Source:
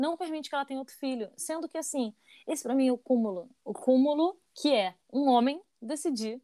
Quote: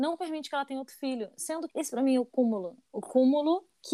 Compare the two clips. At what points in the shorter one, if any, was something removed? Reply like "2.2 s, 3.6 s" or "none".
1.7 s